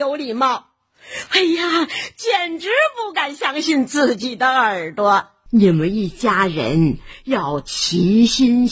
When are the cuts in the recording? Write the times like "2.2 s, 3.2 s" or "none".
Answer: 5.5 s